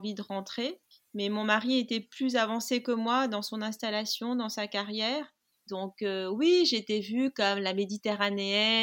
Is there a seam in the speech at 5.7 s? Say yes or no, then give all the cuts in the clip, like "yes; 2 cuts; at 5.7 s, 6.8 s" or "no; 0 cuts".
yes; 1 cut; at 5.7 s